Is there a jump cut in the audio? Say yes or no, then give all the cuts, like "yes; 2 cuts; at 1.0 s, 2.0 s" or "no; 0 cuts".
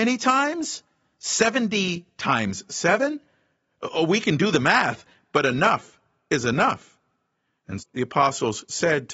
yes; 1 cut; at 7.8 s